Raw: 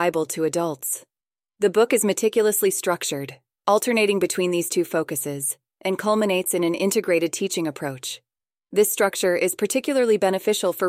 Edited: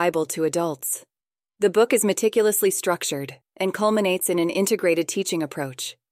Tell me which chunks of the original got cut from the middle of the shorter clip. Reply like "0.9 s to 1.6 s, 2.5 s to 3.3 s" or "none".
3.4 s to 5.7 s